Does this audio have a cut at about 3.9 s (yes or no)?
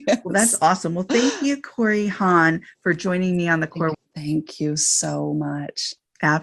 yes